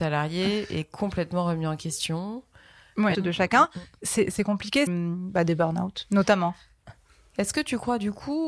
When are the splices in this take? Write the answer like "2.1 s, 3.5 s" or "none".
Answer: 3.1 s, 4.9 s